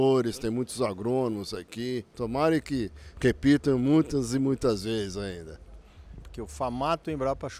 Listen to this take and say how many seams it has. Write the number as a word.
two